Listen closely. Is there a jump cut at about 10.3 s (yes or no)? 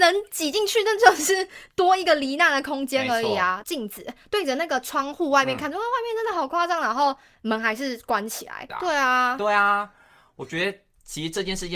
no